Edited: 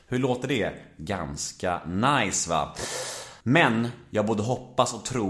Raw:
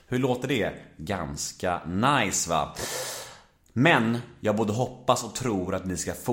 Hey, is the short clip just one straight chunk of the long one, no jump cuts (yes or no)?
no